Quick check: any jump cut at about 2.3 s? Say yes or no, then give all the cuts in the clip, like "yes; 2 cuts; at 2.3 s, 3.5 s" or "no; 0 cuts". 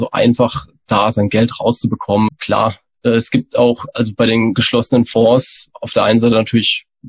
yes; 1 cut; at 2.3 s